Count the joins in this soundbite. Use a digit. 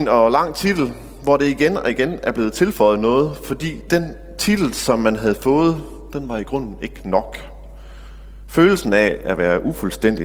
0